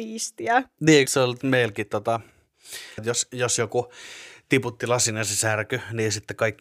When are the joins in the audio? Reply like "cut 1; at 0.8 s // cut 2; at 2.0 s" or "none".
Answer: cut 1; at 1.1 s // cut 2; at 3.0 s